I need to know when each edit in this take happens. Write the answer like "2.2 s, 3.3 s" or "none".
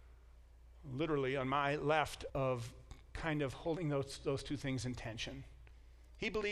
2.3 s